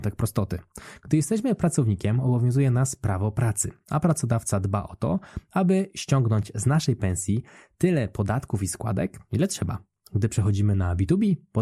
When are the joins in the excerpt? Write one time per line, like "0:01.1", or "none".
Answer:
none